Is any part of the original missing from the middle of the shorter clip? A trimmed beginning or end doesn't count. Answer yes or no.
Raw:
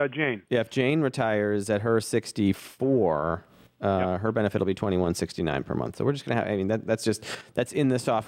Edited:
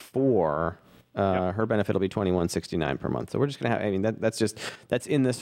no